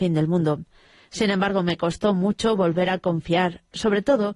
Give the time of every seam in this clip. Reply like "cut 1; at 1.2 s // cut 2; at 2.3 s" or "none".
none